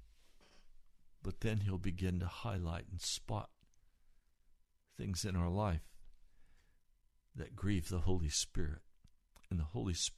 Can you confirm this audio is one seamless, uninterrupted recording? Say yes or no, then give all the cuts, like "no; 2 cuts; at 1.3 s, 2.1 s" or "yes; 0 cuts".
yes; 0 cuts